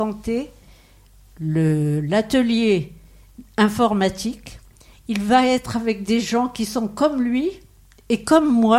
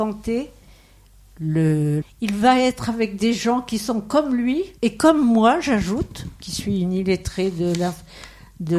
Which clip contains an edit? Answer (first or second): second